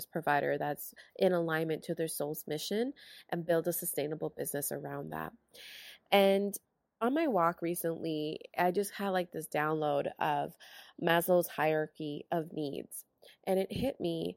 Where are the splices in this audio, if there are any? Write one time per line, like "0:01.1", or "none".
none

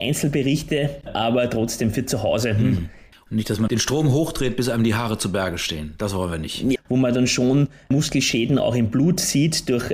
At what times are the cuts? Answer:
0:03.1
0:06.8

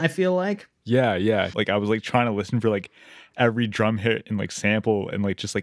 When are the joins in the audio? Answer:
0:01.5

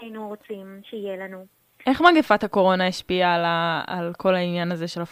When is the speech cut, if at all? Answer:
none

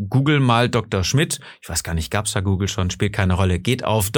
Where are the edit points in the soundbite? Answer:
none

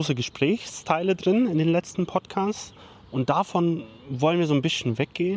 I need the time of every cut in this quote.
none

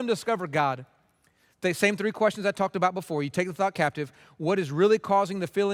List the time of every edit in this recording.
0:01.5

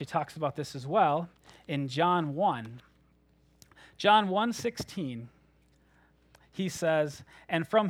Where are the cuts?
none

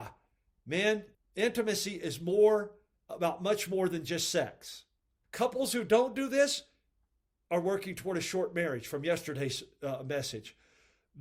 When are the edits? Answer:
0:01.1
0:05.2

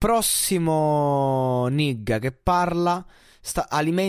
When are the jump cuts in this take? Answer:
none

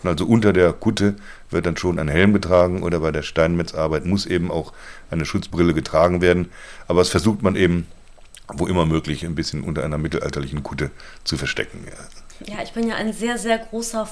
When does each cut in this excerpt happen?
0:12.5

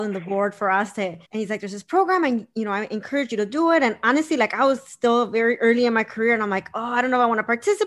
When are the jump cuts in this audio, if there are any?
0:01.2

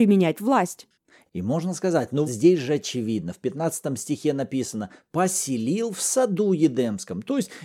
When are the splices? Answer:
0:02.3

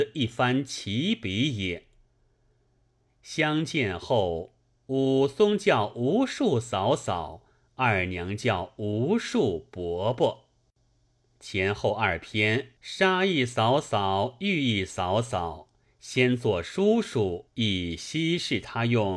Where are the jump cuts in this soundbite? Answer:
0:12.8
0:17.5

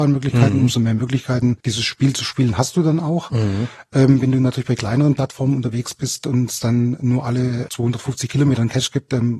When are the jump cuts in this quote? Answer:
0:01.6
0:07.7

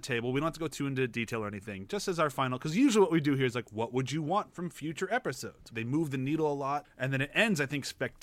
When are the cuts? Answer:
0:05.7
0:06.8

